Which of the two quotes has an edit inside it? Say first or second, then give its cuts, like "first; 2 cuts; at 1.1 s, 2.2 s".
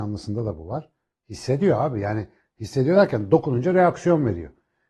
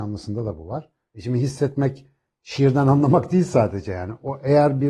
second; 1 cut; at 1.1 s